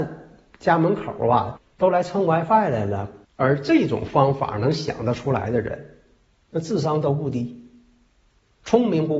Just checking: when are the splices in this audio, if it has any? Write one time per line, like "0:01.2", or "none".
0:01.6
0:03.2